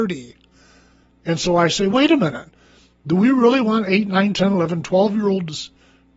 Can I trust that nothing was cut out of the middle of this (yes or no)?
yes